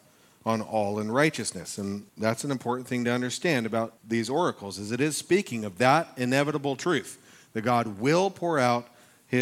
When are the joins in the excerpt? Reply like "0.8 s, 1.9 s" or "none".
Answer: 2.1 s, 4.0 s